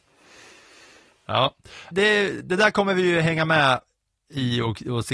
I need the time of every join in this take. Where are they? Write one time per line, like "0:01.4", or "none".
0:01.9